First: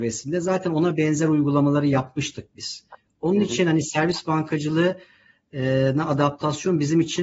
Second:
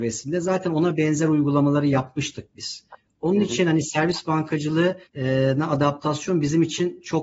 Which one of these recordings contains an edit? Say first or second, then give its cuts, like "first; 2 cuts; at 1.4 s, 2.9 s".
second; 1 cut; at 5.1 s